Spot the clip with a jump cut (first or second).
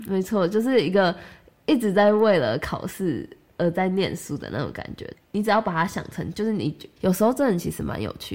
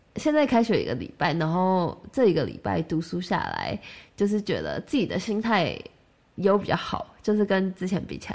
first